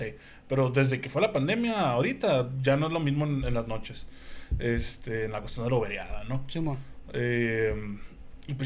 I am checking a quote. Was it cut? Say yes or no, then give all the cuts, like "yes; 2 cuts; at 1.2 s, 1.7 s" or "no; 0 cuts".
no; 0 cuts